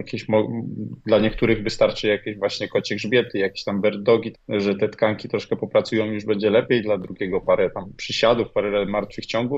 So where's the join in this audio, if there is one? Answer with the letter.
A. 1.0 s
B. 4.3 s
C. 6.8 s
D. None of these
B